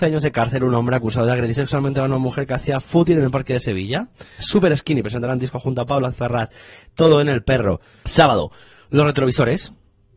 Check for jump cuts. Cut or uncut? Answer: cut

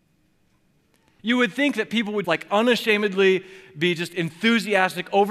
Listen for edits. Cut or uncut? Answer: cut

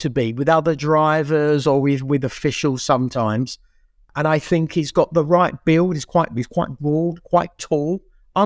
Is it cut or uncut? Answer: uncut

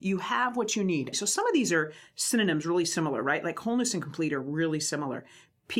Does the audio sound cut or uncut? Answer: cut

